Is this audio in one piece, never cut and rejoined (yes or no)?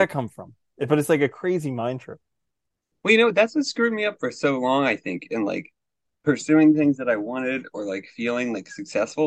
yes